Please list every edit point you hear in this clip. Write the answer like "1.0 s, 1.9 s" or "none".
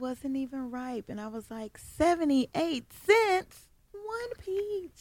3.9 s

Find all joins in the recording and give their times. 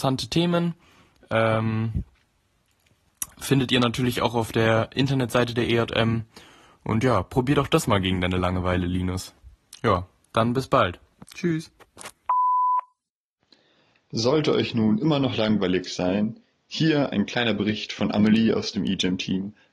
none

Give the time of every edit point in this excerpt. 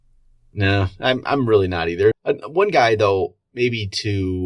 2.1 s

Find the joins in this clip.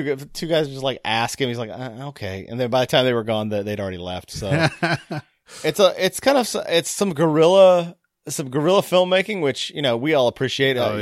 none

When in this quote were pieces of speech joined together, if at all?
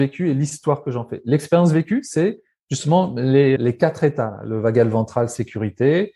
3.6 s

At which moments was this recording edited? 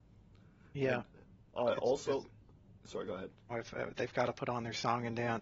3.5 s

